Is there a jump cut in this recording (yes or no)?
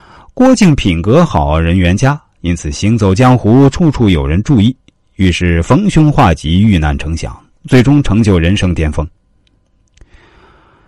no